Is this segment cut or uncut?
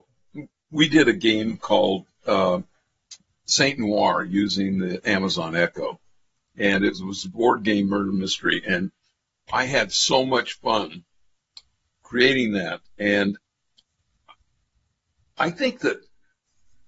uncut